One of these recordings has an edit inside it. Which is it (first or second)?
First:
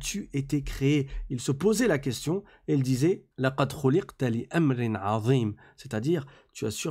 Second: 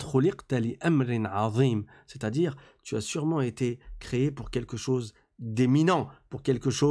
first